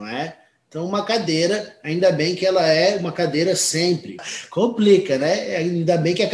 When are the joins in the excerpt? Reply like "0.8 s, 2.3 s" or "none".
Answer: 4.2 s